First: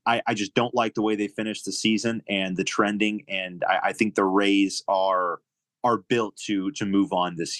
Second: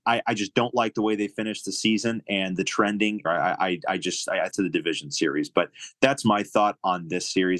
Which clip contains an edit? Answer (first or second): second